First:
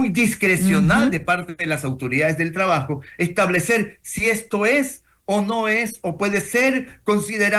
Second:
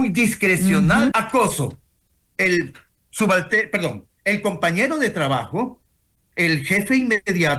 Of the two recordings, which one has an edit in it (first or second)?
second